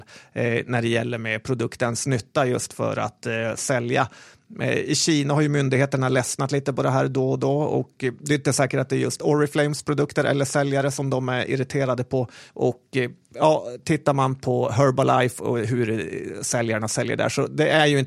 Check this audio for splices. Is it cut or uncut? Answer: cut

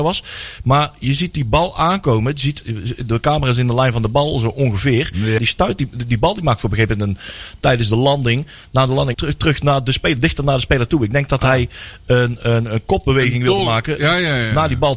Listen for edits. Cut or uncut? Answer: cut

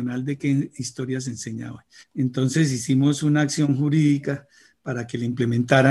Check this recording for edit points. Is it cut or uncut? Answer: cut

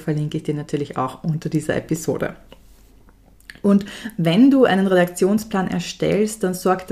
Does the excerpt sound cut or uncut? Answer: uncut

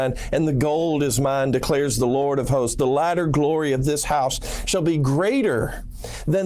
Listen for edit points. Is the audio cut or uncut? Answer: uncut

